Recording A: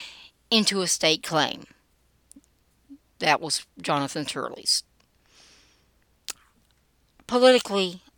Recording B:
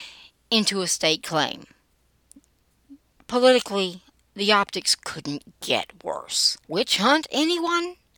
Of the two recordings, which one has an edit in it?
B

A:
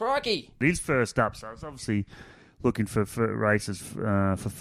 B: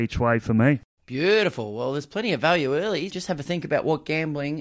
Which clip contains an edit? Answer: B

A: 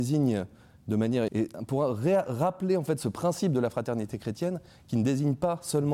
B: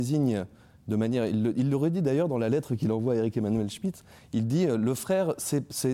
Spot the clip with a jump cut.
A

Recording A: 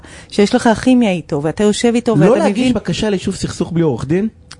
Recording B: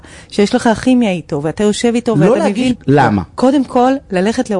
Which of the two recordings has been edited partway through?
B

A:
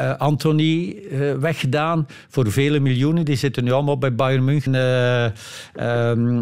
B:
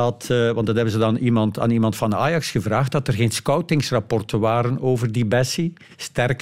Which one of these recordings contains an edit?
A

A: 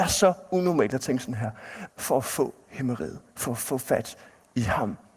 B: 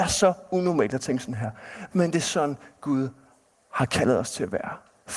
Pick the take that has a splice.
A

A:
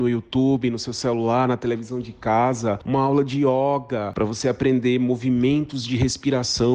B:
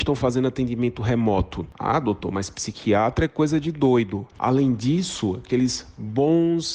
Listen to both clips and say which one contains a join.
B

